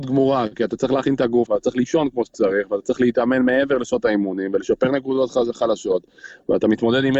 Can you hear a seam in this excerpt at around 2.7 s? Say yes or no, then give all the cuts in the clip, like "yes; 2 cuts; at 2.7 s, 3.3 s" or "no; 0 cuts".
no; 1 cut; at 1.5 s